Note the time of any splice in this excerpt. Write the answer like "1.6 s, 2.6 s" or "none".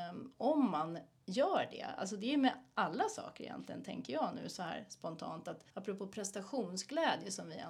5.7 s